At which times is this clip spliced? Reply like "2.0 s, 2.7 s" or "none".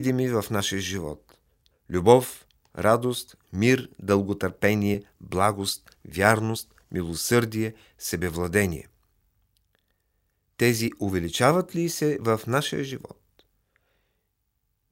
none